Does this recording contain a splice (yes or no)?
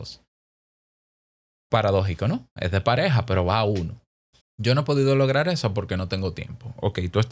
yes